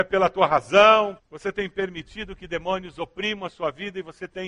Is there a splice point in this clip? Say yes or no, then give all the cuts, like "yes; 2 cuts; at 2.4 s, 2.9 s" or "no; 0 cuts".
yes; 1 cut; at 1.2 s